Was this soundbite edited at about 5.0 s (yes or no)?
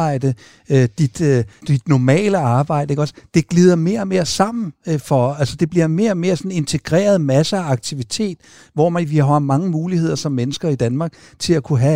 no